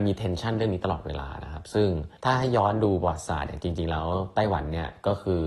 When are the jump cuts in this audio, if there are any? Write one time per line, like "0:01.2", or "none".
0:02.2